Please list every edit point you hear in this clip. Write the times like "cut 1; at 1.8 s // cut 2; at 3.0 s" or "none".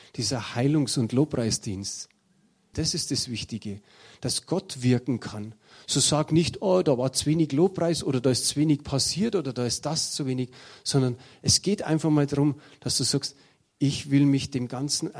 cut 1; at 2.7 s